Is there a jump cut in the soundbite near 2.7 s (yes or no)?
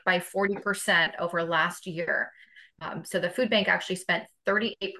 yes